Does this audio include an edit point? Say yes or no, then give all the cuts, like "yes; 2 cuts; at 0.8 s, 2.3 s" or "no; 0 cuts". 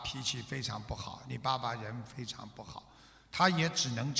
no; 0 cuts